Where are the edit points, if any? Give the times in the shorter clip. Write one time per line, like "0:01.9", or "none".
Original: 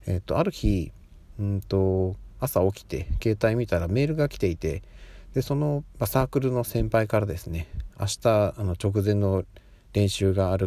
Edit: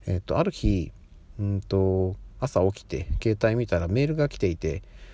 none